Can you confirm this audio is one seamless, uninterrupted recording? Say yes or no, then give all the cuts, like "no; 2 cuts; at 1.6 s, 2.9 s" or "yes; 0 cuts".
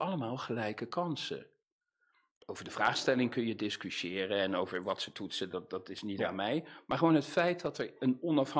yes; 0 cuts